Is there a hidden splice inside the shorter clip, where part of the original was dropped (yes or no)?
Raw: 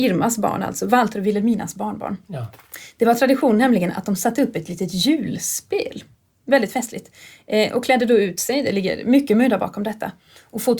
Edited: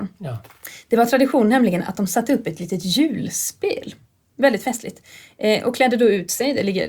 no